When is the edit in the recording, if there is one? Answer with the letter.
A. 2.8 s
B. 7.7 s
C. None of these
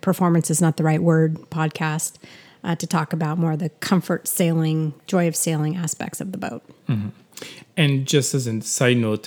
C